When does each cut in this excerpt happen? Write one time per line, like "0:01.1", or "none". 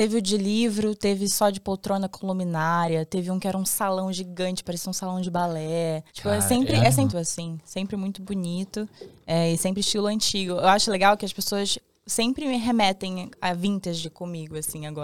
0:06.1
0:07.1